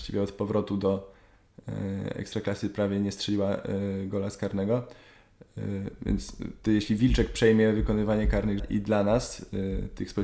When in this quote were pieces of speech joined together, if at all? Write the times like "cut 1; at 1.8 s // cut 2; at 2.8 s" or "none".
cut 1; at 6.7 s // cut 2; at 8.6 s